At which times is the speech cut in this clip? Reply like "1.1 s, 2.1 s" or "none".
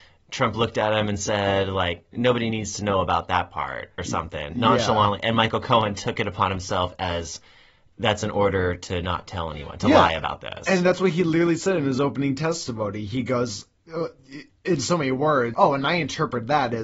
15.5 s